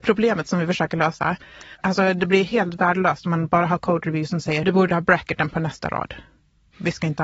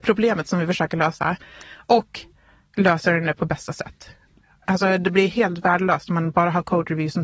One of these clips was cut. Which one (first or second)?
first